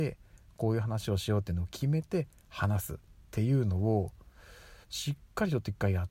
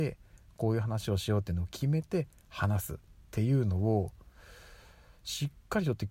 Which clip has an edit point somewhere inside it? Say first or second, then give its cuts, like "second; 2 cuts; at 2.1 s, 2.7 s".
first; 1 cut; at 4.8 s